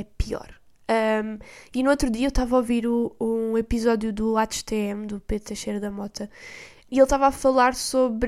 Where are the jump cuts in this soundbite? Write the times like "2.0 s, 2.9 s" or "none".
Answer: 6.9 s